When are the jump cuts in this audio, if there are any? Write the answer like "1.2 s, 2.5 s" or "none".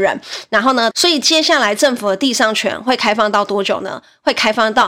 0.9 s